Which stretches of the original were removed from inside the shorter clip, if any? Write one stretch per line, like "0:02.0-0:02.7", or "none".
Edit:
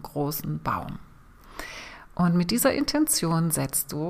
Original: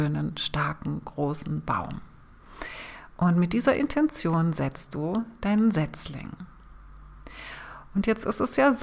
none